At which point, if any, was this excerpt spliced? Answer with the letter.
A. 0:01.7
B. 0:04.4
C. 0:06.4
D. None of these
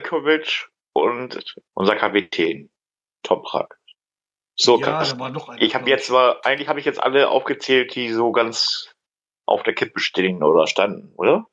A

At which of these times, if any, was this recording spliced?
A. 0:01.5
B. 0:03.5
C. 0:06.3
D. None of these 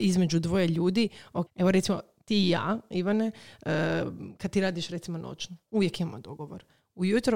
A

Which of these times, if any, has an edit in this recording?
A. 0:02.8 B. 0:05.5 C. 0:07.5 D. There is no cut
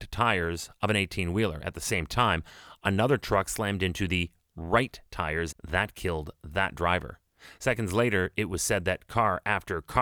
B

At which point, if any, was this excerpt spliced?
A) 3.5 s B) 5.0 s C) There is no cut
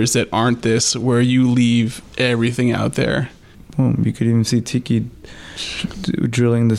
A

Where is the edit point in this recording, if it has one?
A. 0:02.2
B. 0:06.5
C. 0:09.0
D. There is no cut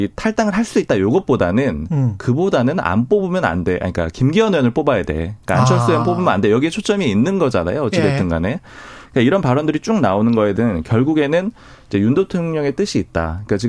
C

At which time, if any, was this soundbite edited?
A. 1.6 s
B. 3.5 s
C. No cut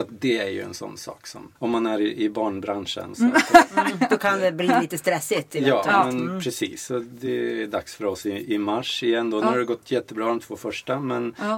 A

